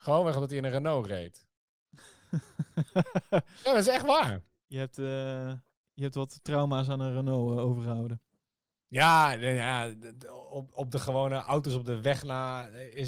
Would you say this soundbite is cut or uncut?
uncut